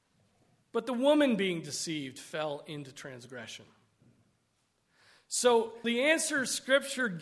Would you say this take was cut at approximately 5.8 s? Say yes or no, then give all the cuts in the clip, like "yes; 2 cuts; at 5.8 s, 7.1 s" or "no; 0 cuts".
yes; 1 cut; at 5.8 s